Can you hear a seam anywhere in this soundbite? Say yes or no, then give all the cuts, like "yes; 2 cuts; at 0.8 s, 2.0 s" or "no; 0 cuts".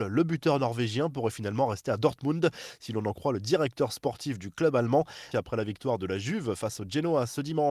yes; 1 cut; at 5.3 s